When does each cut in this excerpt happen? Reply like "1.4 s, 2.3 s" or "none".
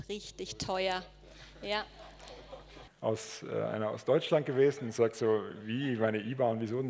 2.9 s